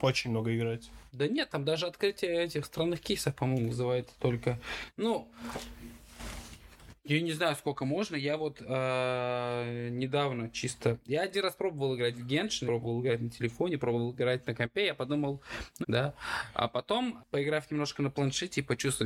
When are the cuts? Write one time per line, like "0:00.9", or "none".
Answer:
0:12.7
0:15.8
0:17.2